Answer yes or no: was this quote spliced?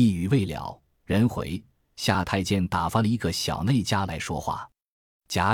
no